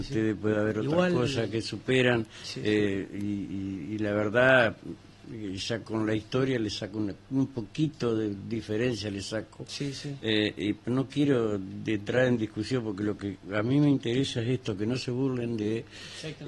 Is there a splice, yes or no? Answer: no